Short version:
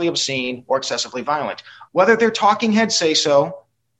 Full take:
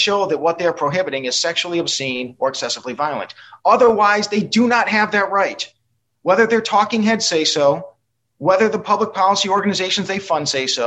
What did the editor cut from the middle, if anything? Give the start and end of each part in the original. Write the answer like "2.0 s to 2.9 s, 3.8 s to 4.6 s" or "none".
3.6 s to 6.2 s